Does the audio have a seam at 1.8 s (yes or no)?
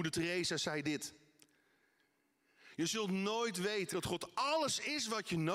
no